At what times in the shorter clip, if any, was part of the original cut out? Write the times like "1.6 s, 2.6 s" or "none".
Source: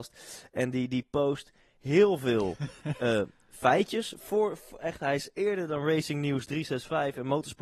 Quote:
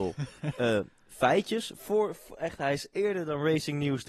none